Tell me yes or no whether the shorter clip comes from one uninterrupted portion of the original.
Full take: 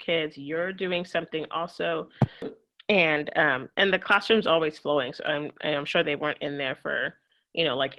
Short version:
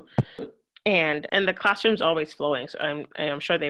no